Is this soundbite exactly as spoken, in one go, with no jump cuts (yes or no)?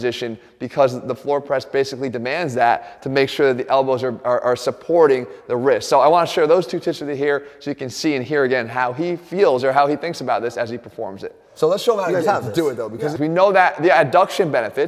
no